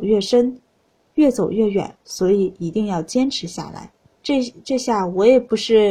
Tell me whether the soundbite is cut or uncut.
cut